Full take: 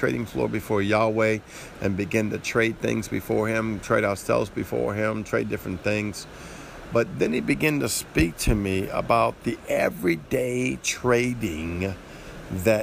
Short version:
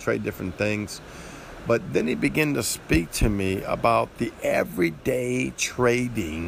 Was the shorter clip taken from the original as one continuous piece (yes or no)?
yes